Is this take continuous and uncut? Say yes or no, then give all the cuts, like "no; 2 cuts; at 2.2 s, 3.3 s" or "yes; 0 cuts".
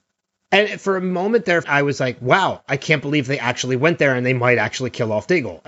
no; 1 cut; at 1.6 s